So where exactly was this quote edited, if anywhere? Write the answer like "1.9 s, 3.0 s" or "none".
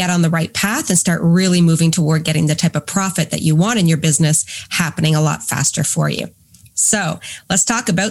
none